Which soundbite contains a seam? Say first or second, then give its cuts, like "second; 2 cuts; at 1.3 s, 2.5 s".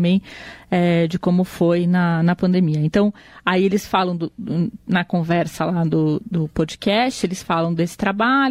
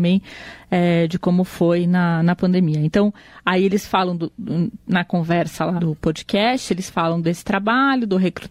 second; 1 cut; at 5.8 s